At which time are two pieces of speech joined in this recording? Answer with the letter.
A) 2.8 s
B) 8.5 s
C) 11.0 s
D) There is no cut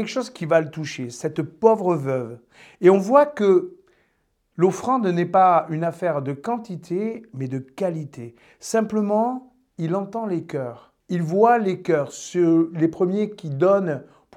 C